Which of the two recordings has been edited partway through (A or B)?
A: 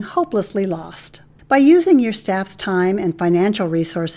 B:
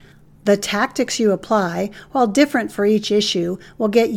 A